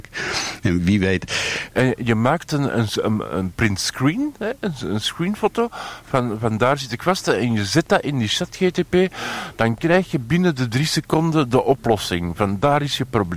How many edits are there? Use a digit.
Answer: 1